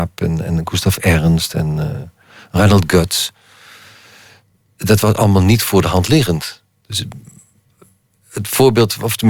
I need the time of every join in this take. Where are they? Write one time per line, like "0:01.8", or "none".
none